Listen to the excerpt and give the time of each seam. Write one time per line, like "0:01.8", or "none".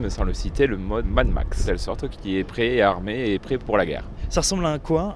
0:01.0

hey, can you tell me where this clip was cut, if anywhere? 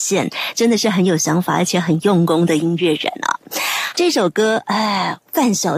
0:03.9

